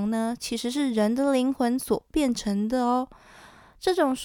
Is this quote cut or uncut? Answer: uncut